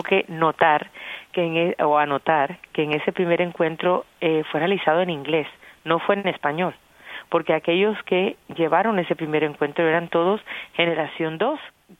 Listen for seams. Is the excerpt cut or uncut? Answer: uncut